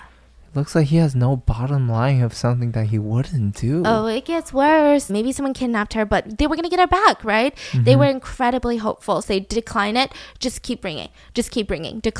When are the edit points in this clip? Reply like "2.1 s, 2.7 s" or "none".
5.1 s, 9.2 s